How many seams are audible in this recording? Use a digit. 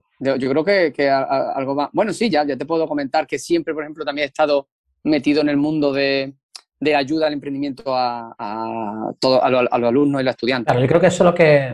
0